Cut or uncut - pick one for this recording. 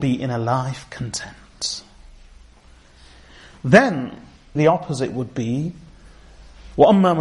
cut